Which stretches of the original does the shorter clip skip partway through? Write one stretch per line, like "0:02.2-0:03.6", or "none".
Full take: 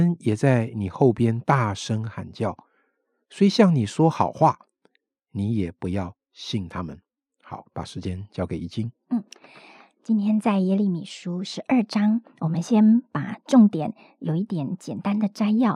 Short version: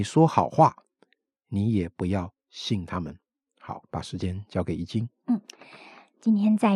none